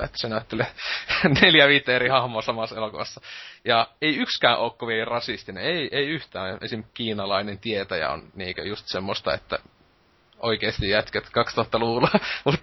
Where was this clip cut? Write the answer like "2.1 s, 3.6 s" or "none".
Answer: none